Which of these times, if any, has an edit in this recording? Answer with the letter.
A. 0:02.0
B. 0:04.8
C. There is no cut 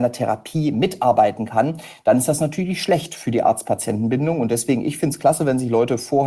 C